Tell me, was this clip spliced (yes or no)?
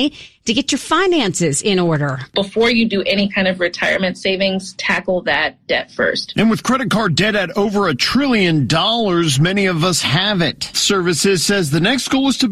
yes